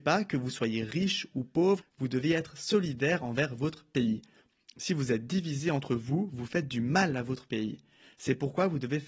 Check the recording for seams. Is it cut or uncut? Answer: cut